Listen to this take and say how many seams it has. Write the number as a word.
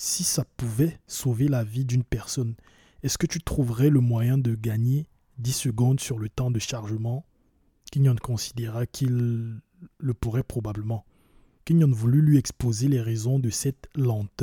one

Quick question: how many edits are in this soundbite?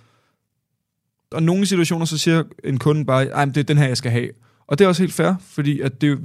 one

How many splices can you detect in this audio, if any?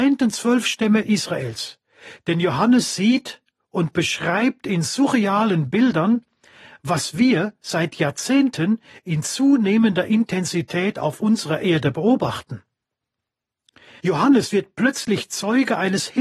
two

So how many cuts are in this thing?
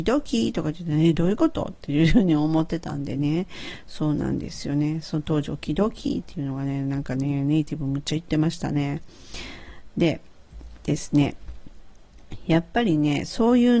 zero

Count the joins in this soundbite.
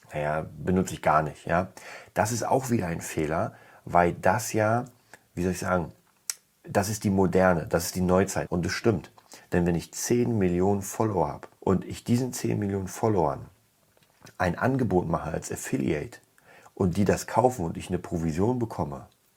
two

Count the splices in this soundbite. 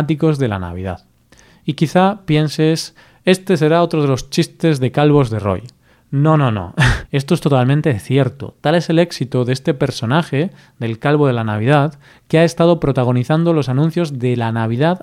one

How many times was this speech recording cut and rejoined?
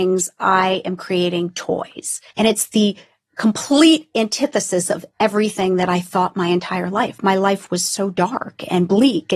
one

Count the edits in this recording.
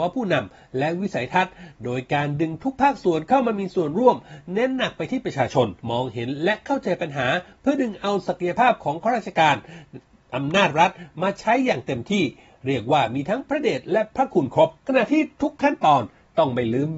two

